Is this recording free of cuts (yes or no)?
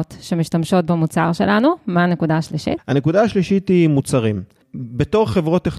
yes